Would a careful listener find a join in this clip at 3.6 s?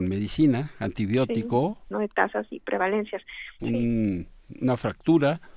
yes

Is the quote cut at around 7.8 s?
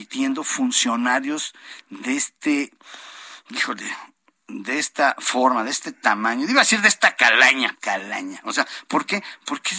yes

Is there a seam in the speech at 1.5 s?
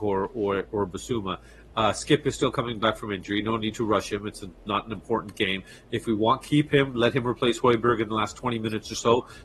no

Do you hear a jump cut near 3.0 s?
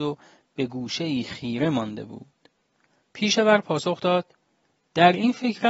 yes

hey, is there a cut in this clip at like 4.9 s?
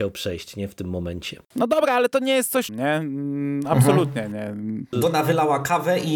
yes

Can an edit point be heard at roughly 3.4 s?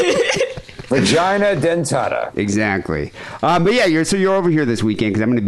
no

